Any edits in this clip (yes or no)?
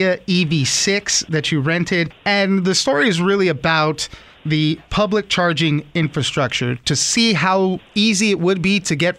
no